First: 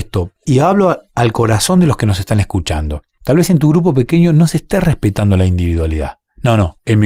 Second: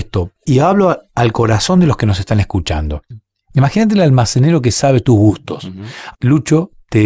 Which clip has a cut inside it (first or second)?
second